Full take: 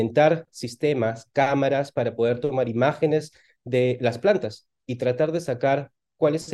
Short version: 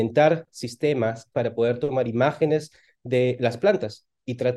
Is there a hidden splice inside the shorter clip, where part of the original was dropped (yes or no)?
yes